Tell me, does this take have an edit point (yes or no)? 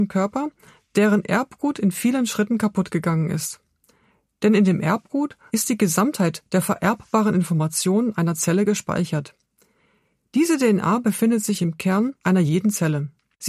yes